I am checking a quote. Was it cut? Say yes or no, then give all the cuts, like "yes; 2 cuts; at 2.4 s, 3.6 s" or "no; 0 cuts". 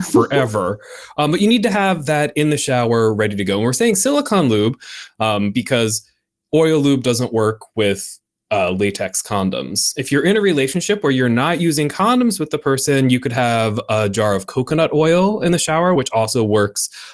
no; 0 cuts